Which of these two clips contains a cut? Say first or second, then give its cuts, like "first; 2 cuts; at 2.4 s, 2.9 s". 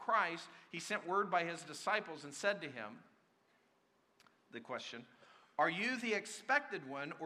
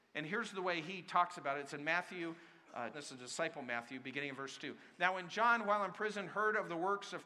second; 1 cut; at 2.9 s